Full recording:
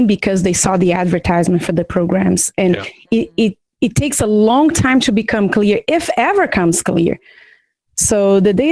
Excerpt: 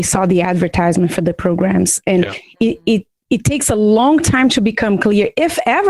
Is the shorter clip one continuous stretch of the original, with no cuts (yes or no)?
yes